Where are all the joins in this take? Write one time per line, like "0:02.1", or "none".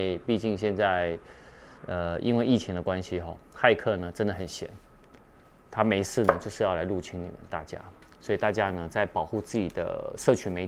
0:01.8